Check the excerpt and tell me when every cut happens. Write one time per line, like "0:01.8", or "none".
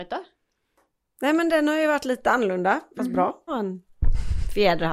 0:03.5